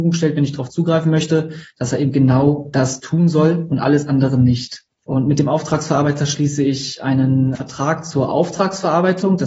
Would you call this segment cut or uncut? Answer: cut